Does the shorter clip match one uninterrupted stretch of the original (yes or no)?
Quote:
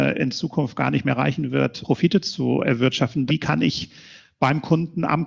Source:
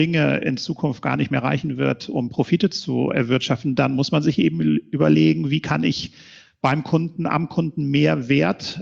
no